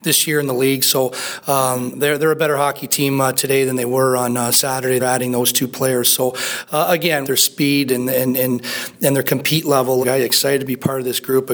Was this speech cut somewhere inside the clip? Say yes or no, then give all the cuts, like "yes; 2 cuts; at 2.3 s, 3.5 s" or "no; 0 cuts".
yes; 3 cuts; at 5.0 s, 7.2 s, 10.0 s